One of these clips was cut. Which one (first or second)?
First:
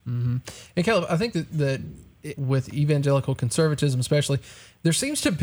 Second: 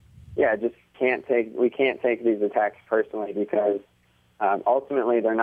first